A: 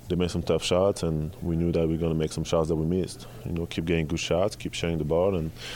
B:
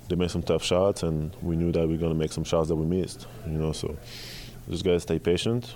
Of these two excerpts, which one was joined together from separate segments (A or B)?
A